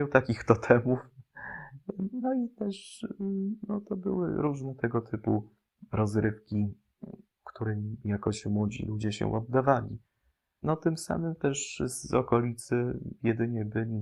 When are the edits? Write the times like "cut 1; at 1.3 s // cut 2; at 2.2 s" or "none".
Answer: cut 1; at 10.6 s